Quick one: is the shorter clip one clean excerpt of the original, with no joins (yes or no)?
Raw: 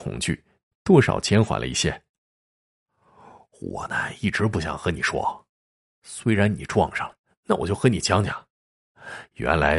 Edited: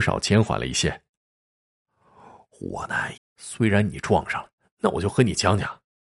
no